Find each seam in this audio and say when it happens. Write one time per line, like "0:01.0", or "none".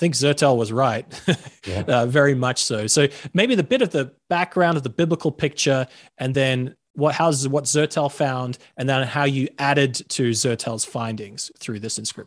none